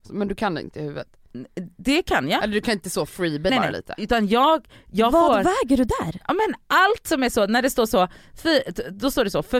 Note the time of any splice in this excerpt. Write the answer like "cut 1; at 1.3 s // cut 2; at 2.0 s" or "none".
cut 1; at 3.5 s